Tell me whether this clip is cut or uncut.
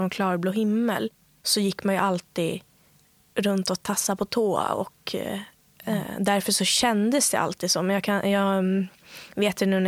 uncut